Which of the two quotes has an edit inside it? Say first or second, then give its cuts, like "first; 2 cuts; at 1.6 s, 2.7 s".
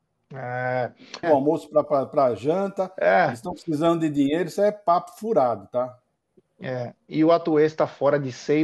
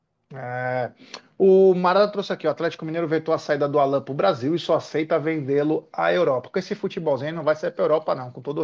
first; 1 cut; at 1.2 s